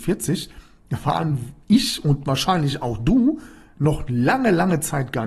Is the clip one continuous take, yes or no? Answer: yes